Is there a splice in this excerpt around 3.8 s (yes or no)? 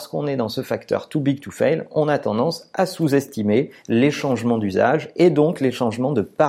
yes